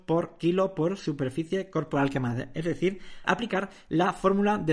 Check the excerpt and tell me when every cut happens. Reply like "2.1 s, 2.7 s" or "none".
3.2 s